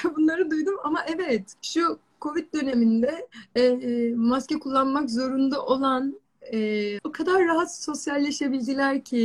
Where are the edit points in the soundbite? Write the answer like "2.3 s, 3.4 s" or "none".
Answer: 1.6 s, 3.6 s, 7.0 s